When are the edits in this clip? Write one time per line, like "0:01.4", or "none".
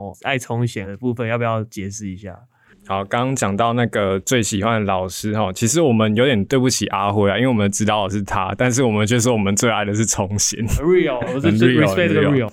0:11.3